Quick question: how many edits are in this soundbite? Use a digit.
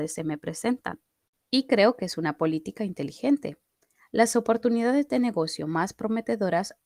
1